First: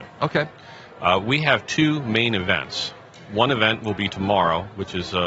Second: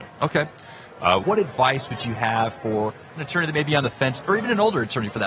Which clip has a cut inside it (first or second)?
second